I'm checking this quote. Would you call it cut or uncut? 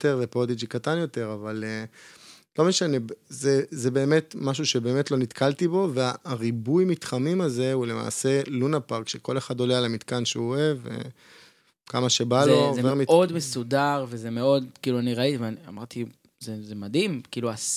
uncut